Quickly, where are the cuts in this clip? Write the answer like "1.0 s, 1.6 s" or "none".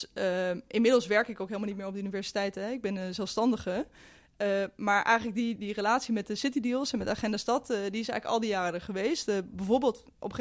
5.6 s